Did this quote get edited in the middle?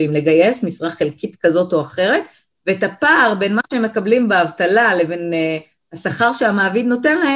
no; 0 cuts

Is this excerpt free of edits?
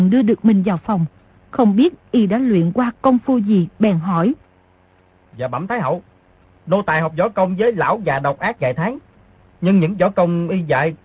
no; 1 cut; at 5.3 s

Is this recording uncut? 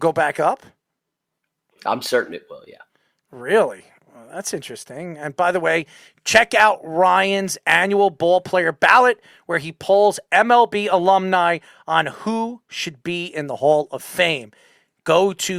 yes; 0 cuts

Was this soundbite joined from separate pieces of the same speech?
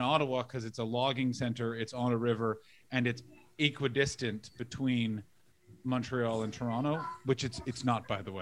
no; 0 cuts

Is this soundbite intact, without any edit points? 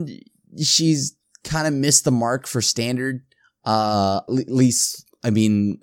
no; 1 cut; at 4.3 s

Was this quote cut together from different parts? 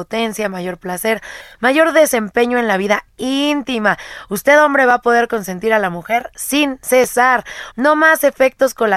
yes; 1 cut; at 7.7 s

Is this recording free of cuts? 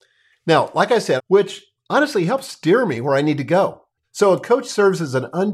no; 2 cuts; at 1.2 s, 4.0 s

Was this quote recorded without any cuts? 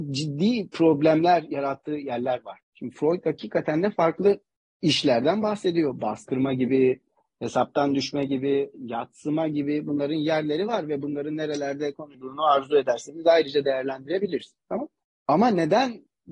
no; 1 cut; at 8.7 s

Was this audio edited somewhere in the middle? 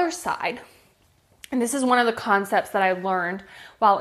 no; 0 cuts

